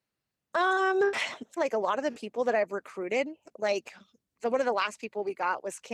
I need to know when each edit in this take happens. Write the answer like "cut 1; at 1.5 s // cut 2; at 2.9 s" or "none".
cut 1; at 1.6 s